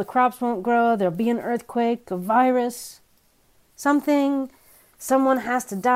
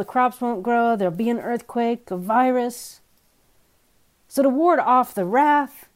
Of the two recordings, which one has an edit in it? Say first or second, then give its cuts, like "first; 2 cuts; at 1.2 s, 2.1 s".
first; 1 cut; at 3.7 s